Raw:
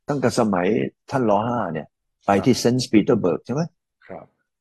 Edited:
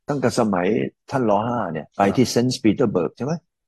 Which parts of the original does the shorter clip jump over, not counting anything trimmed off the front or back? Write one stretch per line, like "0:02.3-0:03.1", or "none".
0:01.9-0:02.2